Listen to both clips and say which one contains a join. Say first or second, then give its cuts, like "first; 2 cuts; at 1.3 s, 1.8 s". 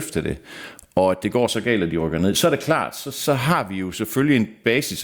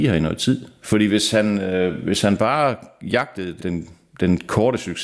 second; 1 cut; at 3.6 s